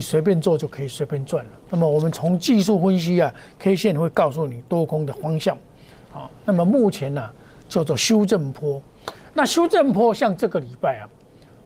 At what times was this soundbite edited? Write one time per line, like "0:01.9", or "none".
0:01.7